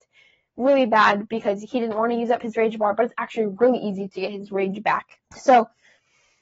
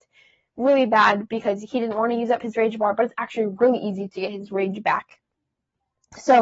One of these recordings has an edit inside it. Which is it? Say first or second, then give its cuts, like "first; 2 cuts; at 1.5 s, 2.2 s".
first; 1 cut; at 5.2 s